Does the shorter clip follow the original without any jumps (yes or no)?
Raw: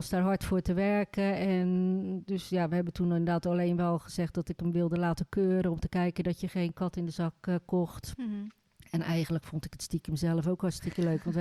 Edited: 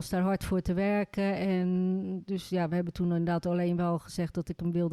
yes